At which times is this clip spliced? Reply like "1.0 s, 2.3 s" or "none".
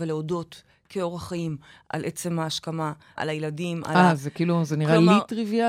3.2 s